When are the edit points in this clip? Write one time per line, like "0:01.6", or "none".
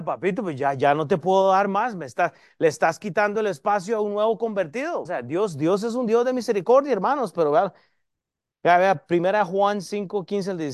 0:05.1